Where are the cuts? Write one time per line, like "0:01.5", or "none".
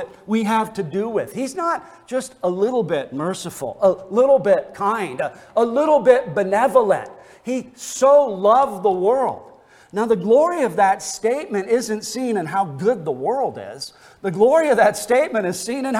none

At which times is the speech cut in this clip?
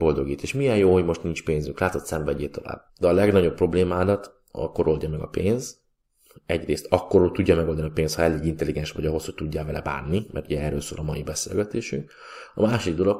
0:02.9

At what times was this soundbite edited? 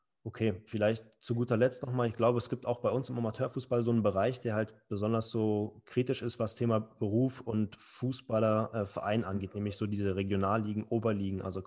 none

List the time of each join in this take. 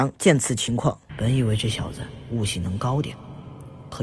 0:01.1

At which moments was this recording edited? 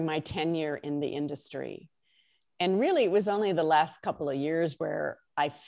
none

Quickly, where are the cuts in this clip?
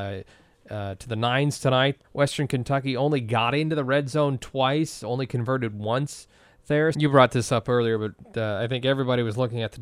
0:02.0
0:06.9

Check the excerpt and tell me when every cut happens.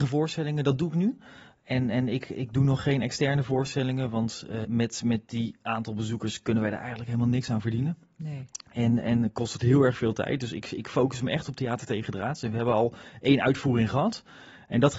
0:04.6

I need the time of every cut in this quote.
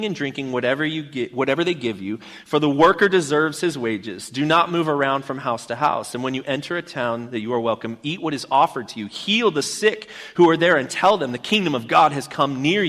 none

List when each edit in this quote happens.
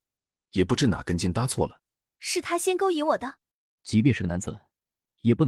0:02.1
0:03.8

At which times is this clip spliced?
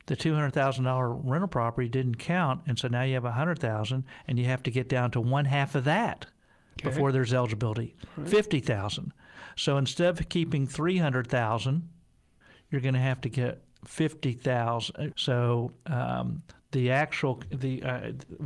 0:15.1

